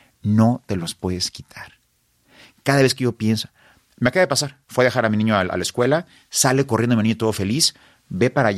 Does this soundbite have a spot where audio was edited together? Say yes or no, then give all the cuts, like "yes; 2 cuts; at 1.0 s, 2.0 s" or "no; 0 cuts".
yes; 1 cut; at 4.6 s